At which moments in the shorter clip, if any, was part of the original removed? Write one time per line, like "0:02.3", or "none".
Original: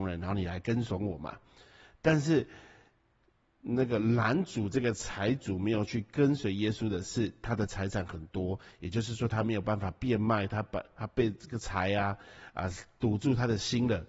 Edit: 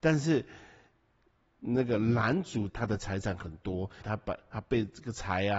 0:02.7
0:04.0